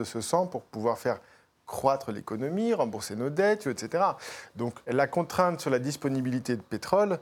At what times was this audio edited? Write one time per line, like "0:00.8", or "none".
0:03.6
0:04.8